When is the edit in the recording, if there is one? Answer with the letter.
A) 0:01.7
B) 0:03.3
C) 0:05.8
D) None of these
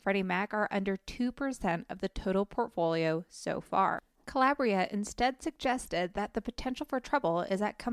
D